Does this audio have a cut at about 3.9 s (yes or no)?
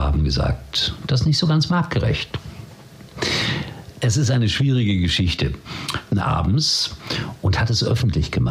no